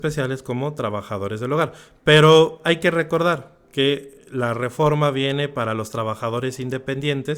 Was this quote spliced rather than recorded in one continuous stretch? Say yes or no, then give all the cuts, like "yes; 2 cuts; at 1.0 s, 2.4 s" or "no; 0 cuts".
no; 0 cuts